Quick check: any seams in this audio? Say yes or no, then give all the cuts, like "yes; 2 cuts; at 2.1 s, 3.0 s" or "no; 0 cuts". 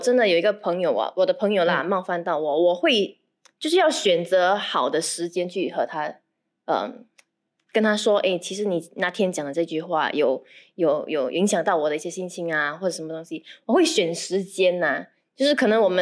no; 0 cuts